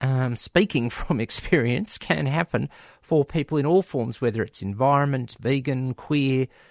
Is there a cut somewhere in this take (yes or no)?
no